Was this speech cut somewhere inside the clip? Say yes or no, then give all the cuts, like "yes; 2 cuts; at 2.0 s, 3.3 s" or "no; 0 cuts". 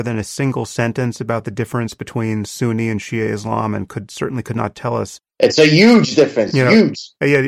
no; 0 cuts